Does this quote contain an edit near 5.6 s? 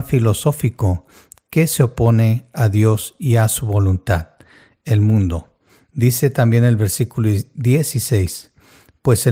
no; 0 cuts

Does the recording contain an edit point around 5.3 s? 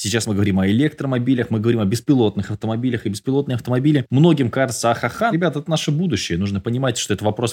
yes; 1 cut; at 5.3 s

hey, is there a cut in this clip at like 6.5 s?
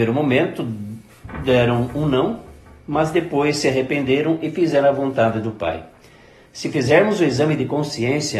yes; 1 cut; at 6.5 s

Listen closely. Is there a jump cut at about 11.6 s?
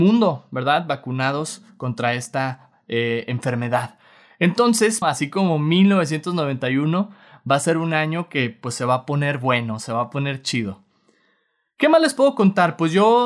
no; 1 cut; at 5.0 s

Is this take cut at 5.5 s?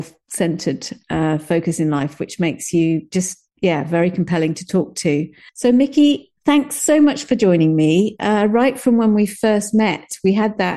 yes; 1 cut; at 5.5 s

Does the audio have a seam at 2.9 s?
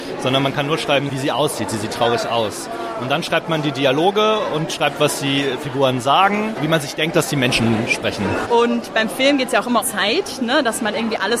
no; 2 cuts; at 8.5 s, 9.8 s

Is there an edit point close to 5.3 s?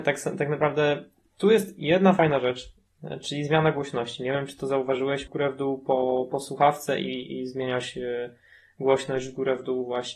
yes; 1 cut; at 5.3 s

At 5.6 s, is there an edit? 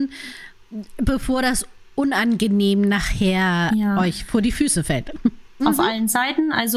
yes; 1 cut; at 5.6 s

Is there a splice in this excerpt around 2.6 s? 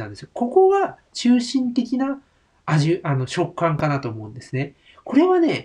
no; 0 cuts

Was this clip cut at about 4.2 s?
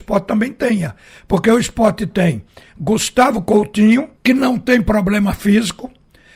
yes; 1 cut; at 4.2 s

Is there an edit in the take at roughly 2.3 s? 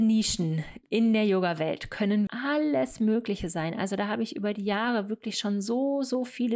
yes; 1 cut; at 2.3 s

